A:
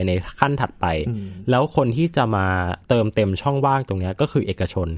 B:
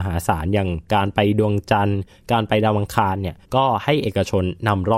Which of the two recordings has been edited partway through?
B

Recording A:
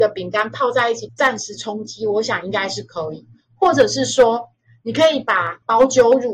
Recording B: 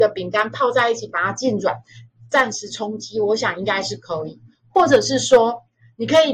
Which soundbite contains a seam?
A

